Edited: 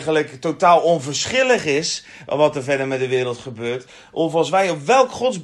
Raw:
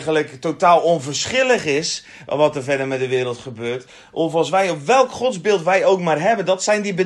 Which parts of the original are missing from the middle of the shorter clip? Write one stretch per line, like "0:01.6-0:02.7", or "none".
none